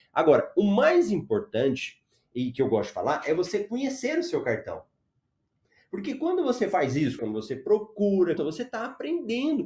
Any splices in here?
yes; 2 cuts; at 7.2 s, 8.4 s

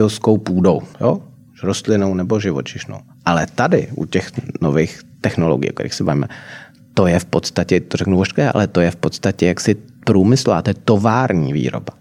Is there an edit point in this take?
yes; 1 cut; at 0.9 s

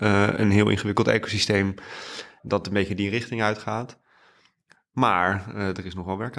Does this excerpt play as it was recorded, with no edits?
no; 1 cut; at 2.4 s

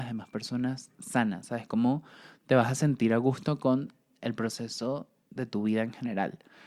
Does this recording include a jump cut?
no; 0 cuts

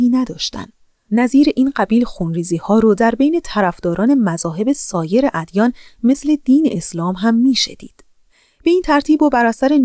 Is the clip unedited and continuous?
yes; 0 cuts

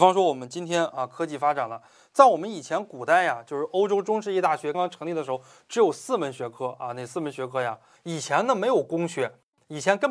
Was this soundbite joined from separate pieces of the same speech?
yes; 2 cuts; at 4.7 s, 8.0 s

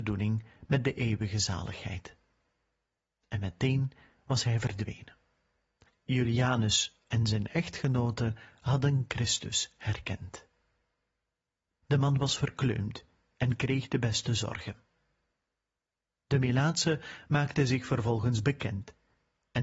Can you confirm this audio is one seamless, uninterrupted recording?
no; 1 cut; at 11.8 s

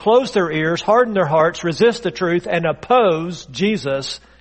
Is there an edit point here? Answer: no; 0 cuts

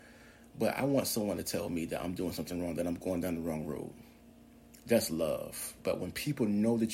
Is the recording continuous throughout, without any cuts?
no; 1 cut; at 5.8 s

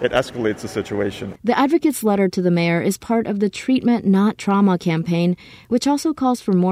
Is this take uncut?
no; 1 cut; at 1.4 s

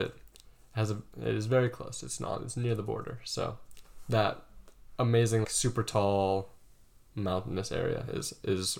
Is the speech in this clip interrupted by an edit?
yes; 1 cut; at 5.4 s

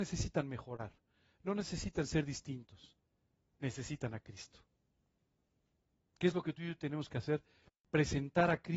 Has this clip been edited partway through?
no; 0 cuts

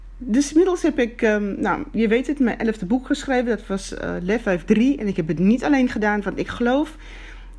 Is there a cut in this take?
no; 0 cuts

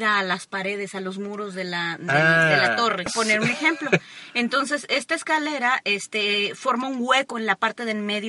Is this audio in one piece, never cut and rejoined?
no; 1 cut; at 3.1 s

